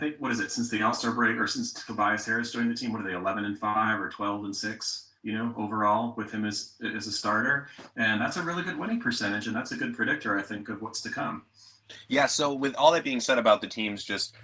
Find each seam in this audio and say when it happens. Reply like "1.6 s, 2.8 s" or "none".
none